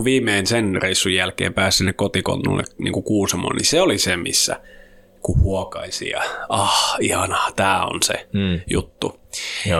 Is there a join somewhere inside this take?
no; 0 cuts

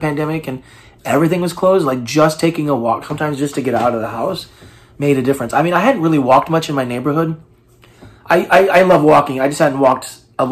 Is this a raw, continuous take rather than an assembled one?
yes; 0 cuts

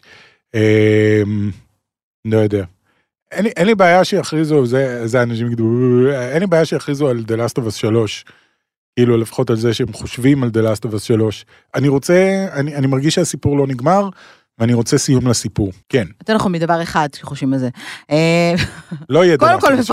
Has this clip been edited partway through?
yes; 1 cut; at 15.8 s

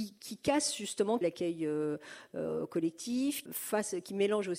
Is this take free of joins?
no; 2 cuts; at 1.2 s, 3.4 s

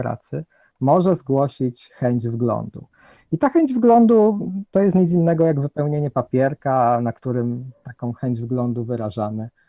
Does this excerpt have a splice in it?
no; 0 cuts

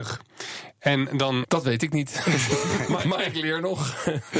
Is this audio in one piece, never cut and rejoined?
no; 2 cuts; at 1.4 s, 3.0 s

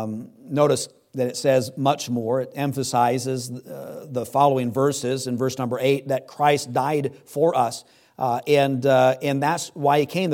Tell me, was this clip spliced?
no; 0 cuts

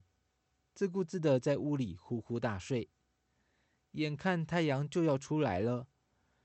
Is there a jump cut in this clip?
no; 0 cuts

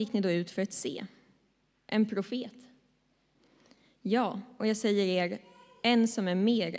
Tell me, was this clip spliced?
no; 0 cuts

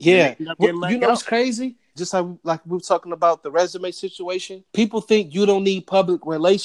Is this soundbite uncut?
no; 2 cuts; at 2.0 s, 4.7 s

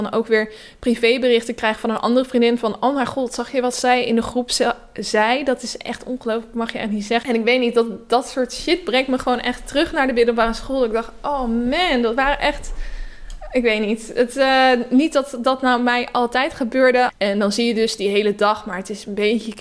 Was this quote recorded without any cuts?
no; 2 cuts; at 7.2 s, 17.1 s

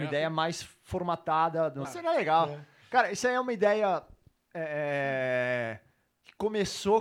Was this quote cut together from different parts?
yes; 1 cut; at 1.8 s

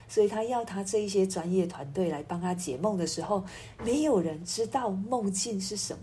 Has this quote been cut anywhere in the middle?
no; 0 cuts

